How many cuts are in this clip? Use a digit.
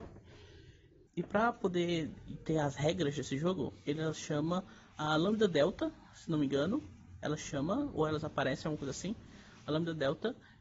1